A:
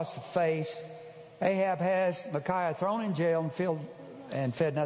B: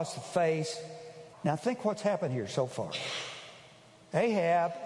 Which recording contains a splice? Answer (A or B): B